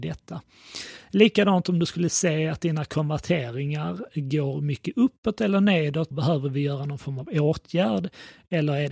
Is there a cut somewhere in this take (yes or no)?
yes